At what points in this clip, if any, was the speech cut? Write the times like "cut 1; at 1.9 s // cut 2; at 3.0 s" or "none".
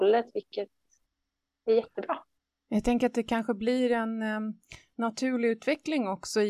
none